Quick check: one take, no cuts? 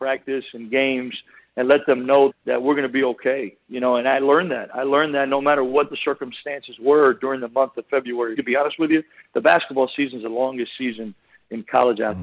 no; 2 cuts; at 2.3 s, 8.4 s

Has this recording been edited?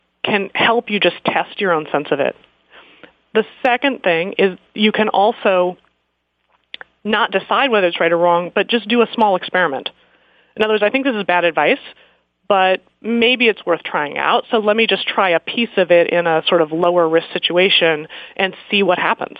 no; 0 cuts

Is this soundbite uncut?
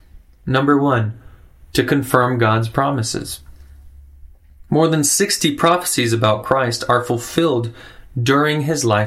no; 1 cut; at 4.7 s

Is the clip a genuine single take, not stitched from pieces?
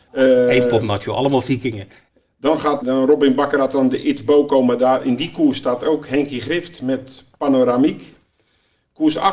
no; 1 cut; at 2.8 s

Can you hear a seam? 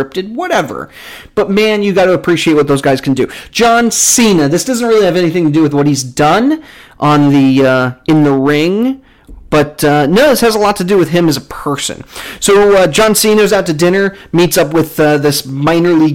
no; 0 cuts

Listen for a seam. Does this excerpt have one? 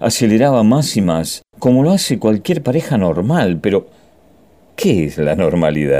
yes; 1 cut; at 1.5 s

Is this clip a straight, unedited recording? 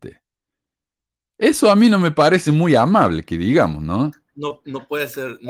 yes; 0 cuts

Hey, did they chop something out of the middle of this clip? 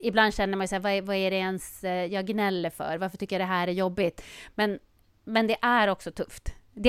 no; 0 cuts

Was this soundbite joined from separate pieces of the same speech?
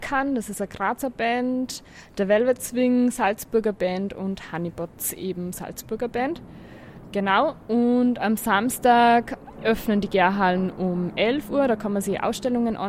yes; 1 cut; at 5.5 s

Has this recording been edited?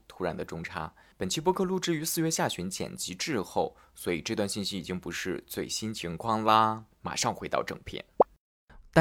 yes; 2 cuts; at 1.1 s, 6.9 s

